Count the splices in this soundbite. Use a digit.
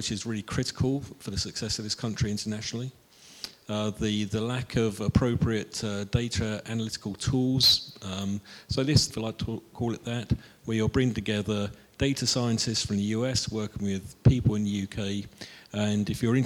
1